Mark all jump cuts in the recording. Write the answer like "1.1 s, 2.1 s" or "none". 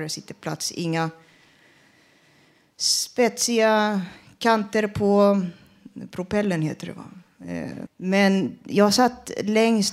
7.9 s